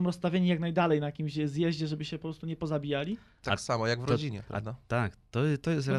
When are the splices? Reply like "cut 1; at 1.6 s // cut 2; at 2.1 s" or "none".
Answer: none